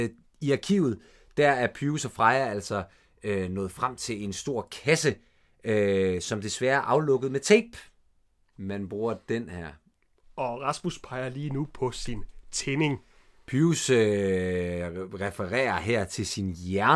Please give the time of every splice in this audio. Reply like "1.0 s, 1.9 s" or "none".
8.5 s